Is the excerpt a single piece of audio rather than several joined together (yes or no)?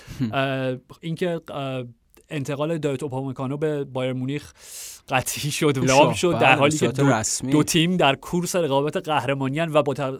no